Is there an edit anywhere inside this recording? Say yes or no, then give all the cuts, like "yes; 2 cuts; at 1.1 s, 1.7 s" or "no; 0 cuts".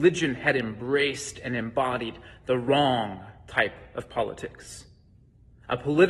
no; 0 cuts